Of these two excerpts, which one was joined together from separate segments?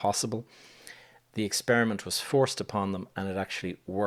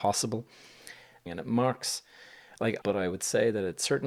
second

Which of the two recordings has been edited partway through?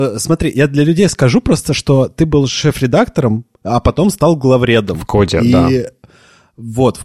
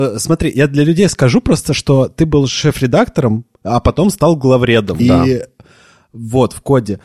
second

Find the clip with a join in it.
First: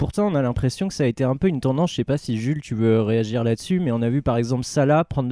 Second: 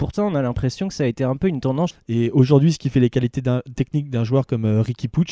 second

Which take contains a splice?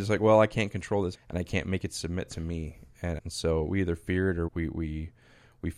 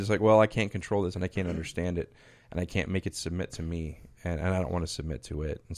first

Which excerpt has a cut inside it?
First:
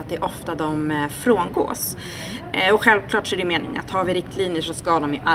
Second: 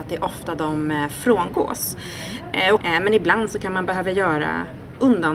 second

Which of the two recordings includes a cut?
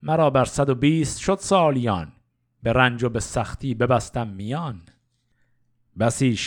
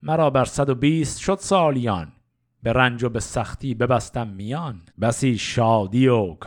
second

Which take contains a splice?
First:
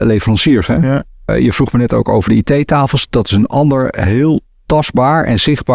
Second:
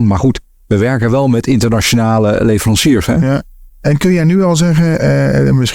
first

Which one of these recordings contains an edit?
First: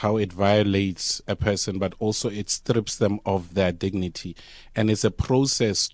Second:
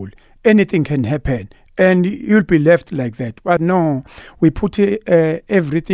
second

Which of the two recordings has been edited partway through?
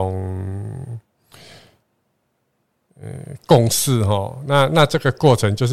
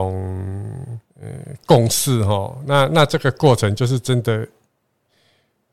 second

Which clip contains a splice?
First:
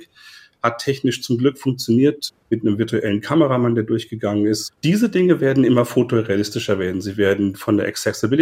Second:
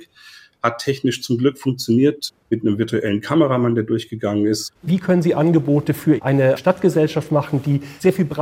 second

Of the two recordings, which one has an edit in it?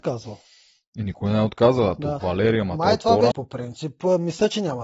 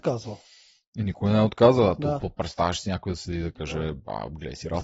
first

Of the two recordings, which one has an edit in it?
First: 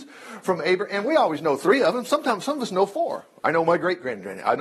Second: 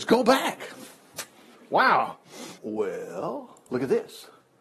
second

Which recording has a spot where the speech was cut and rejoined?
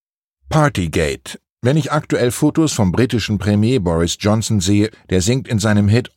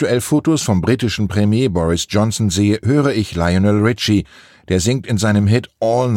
first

